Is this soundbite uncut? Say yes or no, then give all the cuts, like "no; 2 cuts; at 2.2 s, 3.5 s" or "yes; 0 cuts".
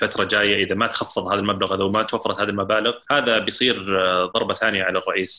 no; 1 cut; at 3.0 s